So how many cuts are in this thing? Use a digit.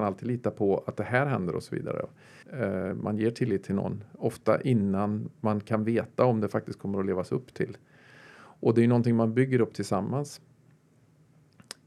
1